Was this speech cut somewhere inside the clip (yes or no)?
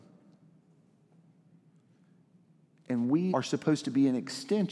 yes